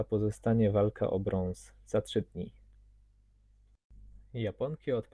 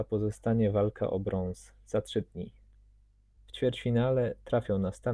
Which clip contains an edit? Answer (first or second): second